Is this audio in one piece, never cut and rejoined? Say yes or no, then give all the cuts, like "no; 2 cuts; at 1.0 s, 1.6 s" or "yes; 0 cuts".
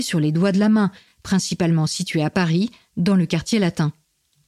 yes; 0 cuts